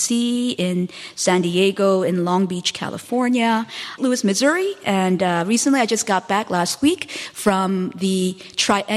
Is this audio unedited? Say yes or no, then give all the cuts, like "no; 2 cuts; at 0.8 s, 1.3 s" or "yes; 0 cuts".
no; 1 cut; at 4.0 s